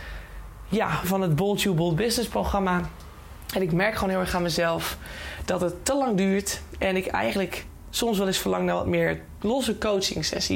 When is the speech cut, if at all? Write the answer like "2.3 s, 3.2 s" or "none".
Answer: 1.0 s